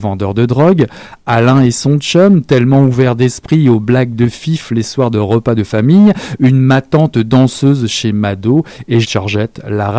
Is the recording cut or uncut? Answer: cut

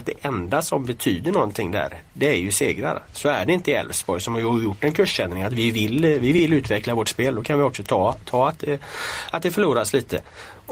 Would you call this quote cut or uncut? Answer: uncut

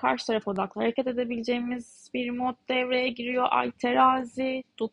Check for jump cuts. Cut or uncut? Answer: uncut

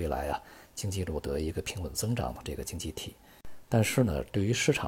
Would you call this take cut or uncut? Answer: uncut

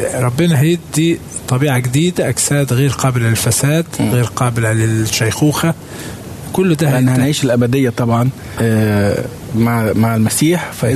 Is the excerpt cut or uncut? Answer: cut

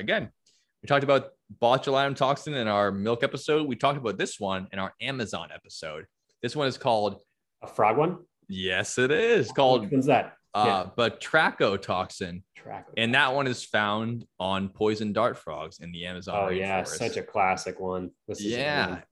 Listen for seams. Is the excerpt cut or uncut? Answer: uncut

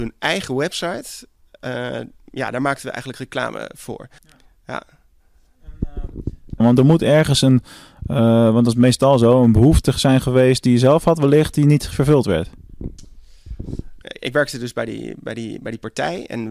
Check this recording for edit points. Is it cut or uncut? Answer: cut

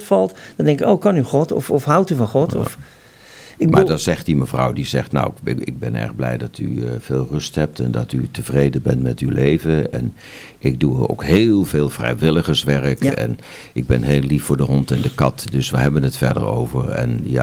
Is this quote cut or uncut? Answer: uncut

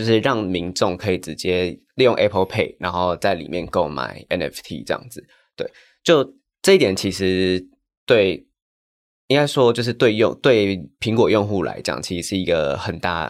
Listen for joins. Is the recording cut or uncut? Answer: uncut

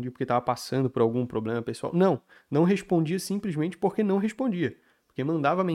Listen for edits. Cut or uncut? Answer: uncut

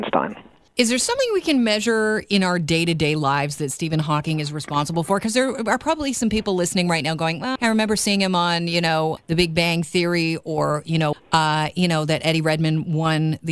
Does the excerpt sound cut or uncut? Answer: cut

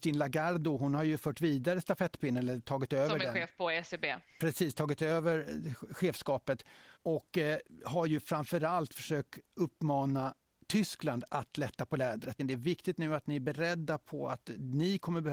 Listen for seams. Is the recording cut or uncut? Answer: cut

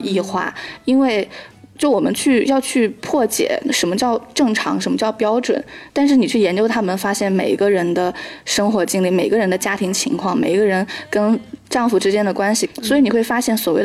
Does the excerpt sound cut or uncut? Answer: cut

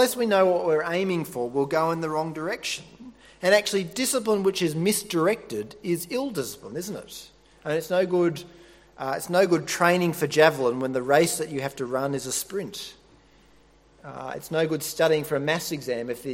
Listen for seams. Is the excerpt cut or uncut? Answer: uncut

